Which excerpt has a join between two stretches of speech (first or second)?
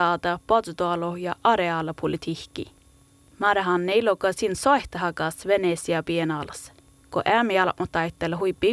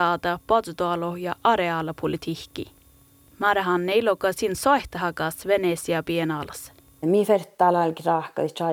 second